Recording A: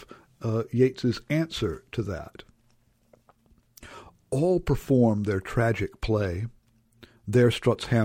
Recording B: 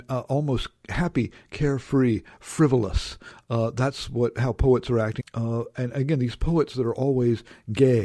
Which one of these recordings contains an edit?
B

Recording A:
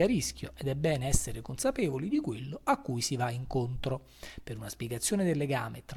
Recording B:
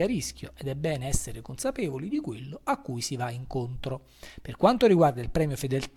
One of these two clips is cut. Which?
B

